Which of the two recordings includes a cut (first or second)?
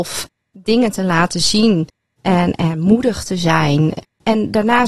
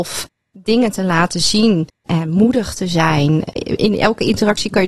second